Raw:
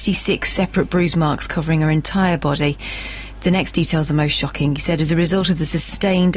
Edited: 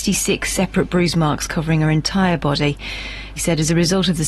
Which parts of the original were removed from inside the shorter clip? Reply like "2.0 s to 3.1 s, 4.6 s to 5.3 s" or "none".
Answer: 3.4 s to 4.8 s